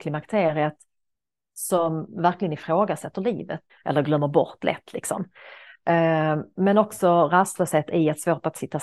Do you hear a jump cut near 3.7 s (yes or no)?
yes